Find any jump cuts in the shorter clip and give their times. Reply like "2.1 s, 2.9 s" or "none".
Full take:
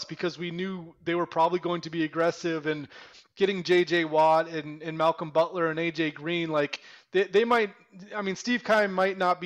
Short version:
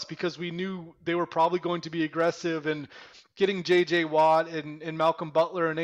none